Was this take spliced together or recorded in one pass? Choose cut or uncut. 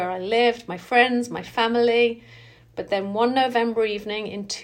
uncut